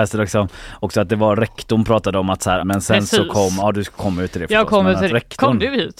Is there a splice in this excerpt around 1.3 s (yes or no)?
no